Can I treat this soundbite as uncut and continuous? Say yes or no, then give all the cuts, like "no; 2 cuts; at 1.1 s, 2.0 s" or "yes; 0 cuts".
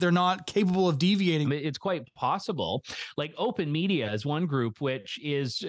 no; 1 cut; at 1.4 s